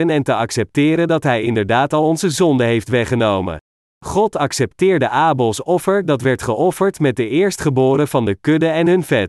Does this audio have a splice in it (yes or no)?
yes